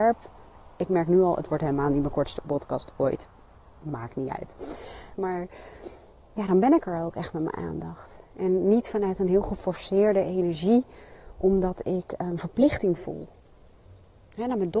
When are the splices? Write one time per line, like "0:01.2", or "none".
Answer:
0:05.2